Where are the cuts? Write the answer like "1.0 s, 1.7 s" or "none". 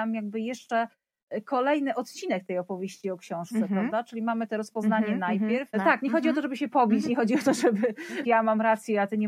5.7 s, 8.2 s